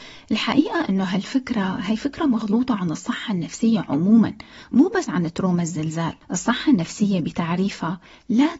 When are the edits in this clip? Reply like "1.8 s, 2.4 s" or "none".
6.2 s